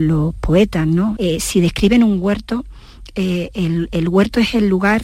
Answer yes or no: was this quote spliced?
yes